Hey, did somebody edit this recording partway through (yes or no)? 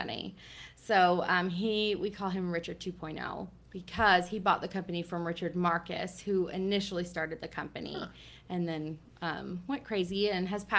no